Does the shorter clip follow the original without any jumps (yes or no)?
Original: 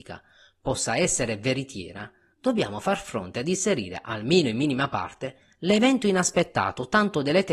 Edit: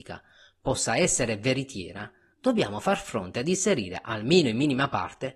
yes